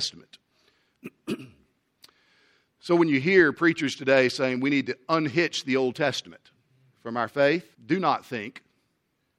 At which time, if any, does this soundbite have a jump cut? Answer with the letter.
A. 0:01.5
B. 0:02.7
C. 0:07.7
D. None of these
C